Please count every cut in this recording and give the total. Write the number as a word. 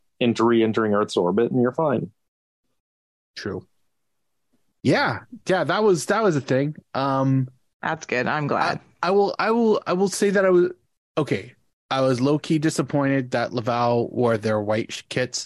one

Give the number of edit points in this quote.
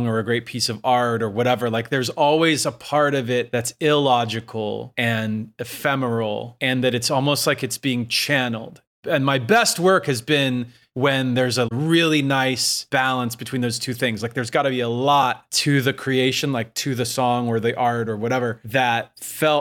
zero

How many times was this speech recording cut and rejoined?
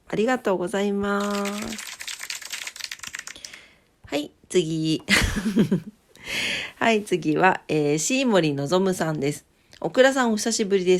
zero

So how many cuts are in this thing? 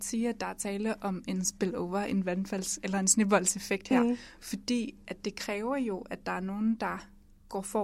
zero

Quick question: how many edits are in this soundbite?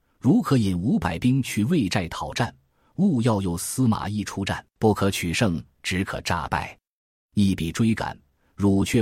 one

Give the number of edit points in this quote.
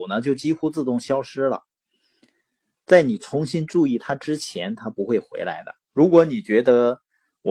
one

